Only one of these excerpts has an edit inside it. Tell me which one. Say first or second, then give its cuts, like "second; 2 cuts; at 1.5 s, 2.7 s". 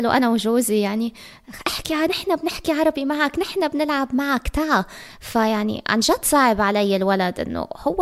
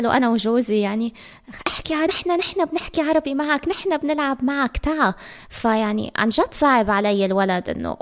first; 1 cut; at 2.1 s